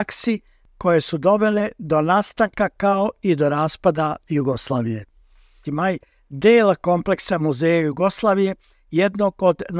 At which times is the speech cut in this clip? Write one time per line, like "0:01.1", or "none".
0:05.6